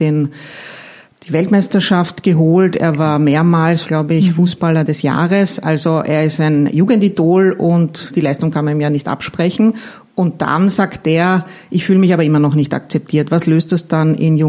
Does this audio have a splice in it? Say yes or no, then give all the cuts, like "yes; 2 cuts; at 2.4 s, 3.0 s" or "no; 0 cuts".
yes; 1 cut; at 3.8 s